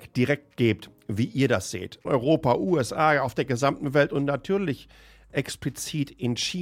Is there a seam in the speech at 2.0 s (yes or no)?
yes